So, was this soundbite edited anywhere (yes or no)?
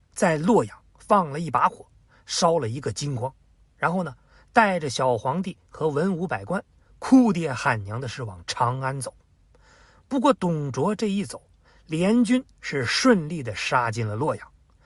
no